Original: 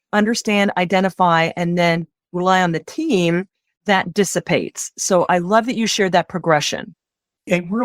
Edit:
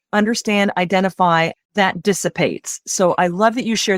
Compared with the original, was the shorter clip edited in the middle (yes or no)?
yes